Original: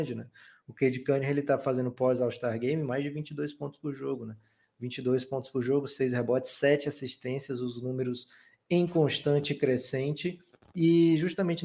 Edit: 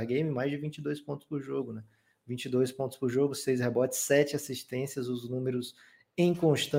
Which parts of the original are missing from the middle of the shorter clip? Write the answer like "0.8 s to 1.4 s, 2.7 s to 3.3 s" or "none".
none